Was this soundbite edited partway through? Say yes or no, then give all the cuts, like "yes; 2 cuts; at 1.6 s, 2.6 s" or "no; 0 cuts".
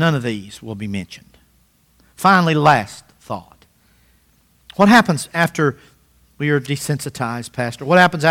no; 0 cuts